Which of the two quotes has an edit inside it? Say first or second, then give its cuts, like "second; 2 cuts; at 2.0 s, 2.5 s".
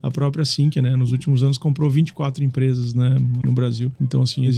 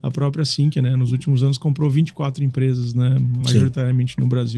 first; 1 cut; at 3.4 s